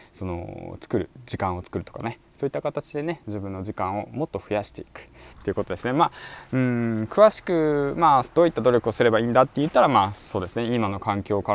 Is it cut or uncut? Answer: cut